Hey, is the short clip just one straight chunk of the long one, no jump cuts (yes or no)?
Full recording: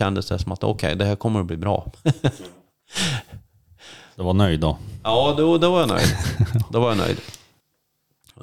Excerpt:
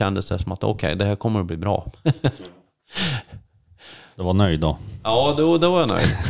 yes